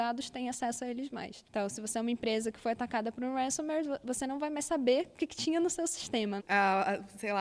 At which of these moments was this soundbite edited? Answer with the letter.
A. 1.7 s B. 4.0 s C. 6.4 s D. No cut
C